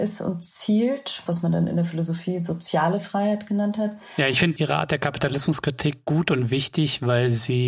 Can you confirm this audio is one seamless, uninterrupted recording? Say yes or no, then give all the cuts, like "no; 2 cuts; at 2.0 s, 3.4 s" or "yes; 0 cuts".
no; 1 cut; at 1.3 s